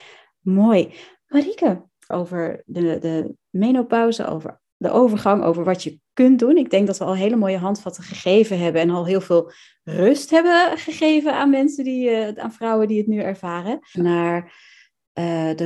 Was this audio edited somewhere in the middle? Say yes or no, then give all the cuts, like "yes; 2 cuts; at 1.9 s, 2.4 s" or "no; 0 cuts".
yes; 2 cuts; at 2.1 s, 13.9 s